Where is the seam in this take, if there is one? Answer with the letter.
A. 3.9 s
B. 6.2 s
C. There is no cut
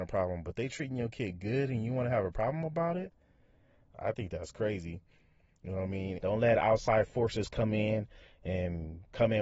B